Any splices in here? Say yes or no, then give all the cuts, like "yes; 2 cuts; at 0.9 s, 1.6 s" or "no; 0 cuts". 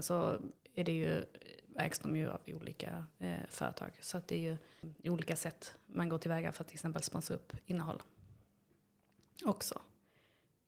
no; 0 cuts